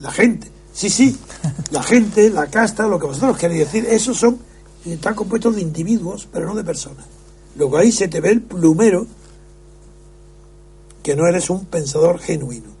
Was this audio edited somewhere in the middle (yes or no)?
no